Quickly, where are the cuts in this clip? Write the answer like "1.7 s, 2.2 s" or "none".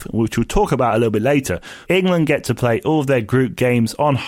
1.8 s

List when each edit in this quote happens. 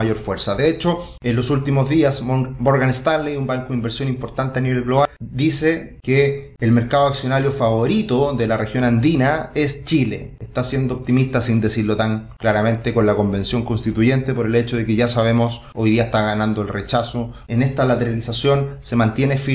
10.4 s, 17.5 s

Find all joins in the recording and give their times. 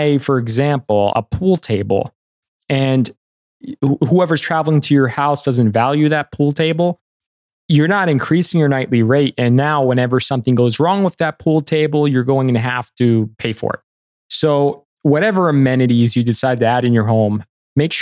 1.1 s

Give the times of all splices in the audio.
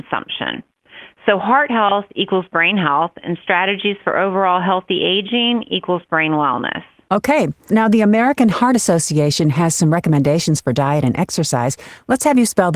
7.7 s

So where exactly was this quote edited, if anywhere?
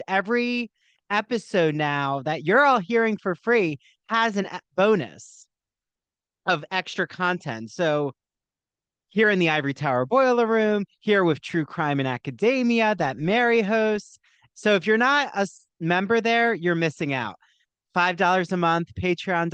none

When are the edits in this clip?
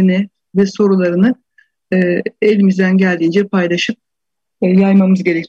none

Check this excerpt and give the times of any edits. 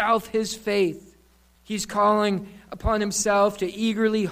1.5 s

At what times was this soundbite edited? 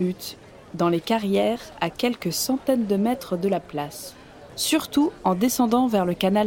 4.5 s

